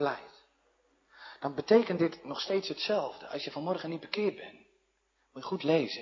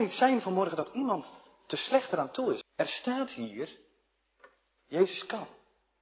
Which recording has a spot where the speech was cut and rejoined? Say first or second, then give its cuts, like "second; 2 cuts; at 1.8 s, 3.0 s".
second; 1 cut; at 2.6 s